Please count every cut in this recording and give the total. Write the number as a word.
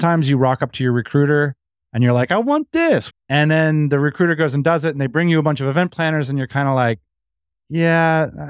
one